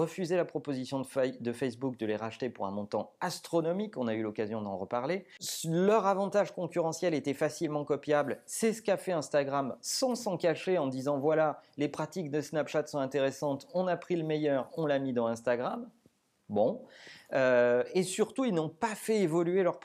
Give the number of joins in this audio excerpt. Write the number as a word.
zero